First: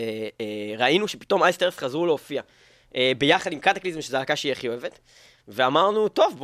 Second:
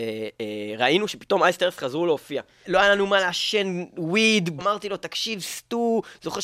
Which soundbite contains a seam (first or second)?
second